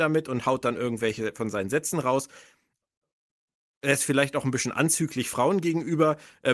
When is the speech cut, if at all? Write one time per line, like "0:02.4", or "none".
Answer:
none